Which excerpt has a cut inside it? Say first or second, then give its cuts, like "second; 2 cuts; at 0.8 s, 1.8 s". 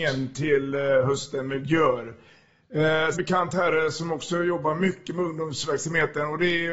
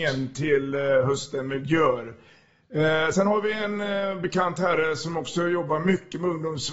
first; 1 cut; at 3.1 s